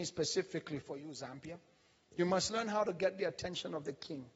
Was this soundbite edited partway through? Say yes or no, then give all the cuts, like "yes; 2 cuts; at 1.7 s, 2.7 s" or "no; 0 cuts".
no; 0 cuts